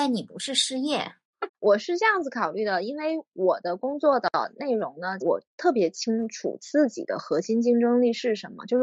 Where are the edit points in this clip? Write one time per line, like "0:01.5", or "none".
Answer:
0:01.5
0:05.2